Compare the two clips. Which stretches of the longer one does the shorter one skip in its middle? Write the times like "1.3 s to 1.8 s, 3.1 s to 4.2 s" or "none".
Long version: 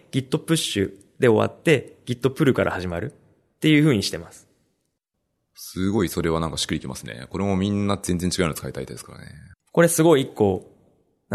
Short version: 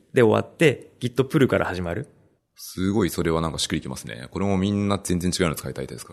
3.4 s to 5.3 s